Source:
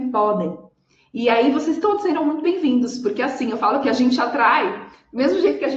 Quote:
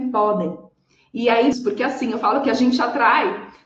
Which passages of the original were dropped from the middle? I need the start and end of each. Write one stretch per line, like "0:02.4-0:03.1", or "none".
0:01.5-0:02.9